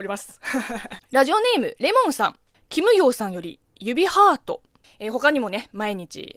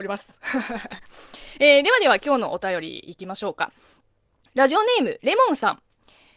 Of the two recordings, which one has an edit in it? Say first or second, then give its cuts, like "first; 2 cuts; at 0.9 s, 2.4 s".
first; 3 cuts; at 1.0 s, 2.5 s, 4.8 s